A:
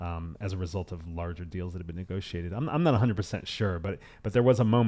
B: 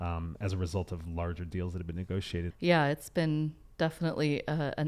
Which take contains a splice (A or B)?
B